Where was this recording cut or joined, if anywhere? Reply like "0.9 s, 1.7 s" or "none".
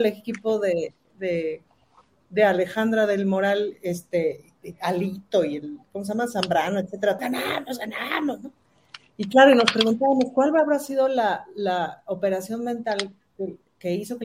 7.2 s